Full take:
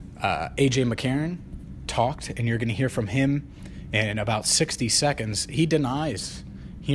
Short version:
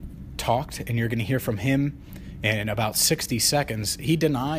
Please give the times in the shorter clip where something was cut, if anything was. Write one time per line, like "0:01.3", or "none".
none